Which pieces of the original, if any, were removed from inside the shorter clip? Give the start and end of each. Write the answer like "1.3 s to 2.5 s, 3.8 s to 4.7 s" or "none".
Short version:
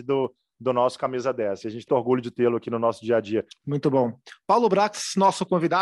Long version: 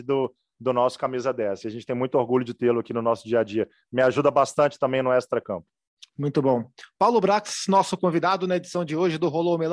1.9 s to 2.1 s, 3.7 s to 6.0 s